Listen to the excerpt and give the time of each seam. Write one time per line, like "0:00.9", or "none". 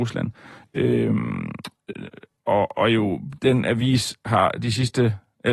none